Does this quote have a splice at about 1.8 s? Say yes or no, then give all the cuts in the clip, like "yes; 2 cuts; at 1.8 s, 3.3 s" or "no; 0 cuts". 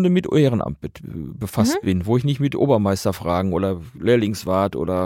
no; 0 cuts